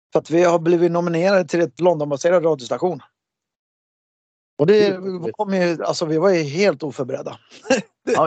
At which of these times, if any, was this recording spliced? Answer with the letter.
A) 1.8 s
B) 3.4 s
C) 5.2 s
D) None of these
A